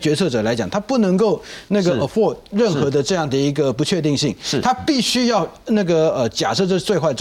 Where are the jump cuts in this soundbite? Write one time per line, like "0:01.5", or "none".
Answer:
none